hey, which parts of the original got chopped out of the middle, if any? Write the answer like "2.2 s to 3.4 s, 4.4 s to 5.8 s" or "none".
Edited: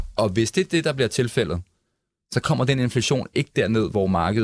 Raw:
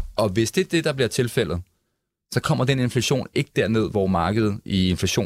none